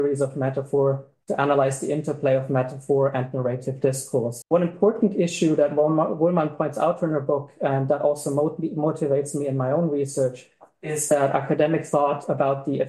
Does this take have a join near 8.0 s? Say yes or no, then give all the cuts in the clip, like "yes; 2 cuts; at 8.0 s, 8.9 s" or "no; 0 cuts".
no; 1 cut; at 4.4 s